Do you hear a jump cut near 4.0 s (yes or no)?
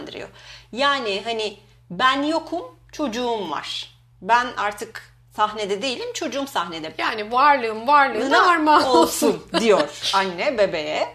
no